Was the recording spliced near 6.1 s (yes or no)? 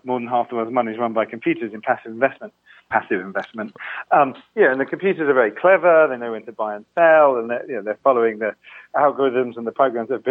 no